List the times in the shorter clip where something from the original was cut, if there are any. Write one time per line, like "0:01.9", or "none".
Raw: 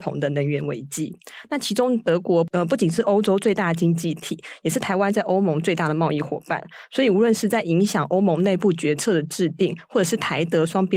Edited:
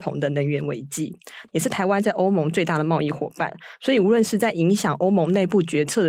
0:01.5